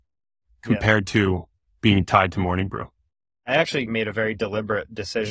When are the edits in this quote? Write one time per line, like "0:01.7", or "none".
0:03.5